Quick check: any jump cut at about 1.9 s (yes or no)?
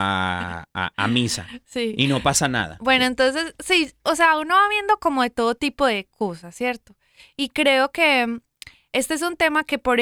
no